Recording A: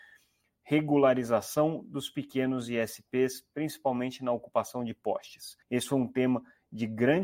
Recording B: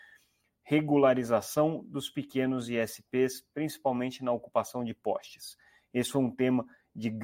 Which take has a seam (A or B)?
A